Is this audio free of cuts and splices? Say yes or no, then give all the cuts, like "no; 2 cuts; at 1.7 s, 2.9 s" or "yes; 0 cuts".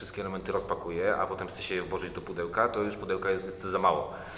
yes; 0 cuts